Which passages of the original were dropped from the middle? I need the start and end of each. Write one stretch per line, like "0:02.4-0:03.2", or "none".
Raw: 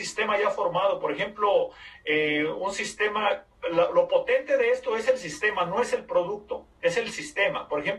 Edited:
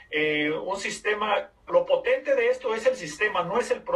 0:03.6-0:03.9